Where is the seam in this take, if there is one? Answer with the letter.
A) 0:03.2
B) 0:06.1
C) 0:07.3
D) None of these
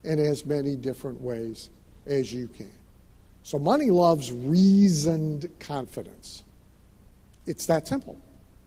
C